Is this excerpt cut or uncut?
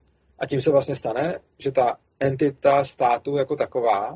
uncut